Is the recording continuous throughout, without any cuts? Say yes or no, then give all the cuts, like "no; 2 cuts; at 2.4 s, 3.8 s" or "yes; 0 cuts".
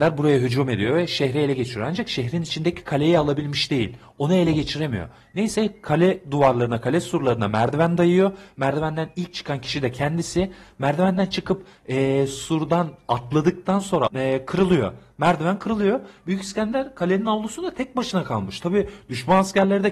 no; 1 cut; at 14.1 s